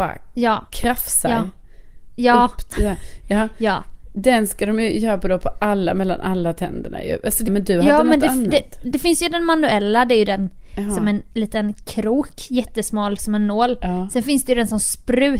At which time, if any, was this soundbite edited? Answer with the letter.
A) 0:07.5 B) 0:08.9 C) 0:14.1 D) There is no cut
A